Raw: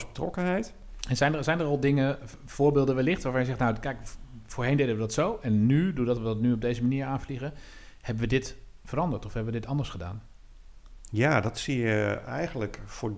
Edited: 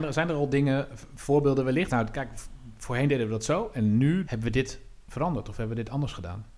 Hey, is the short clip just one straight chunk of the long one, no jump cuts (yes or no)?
no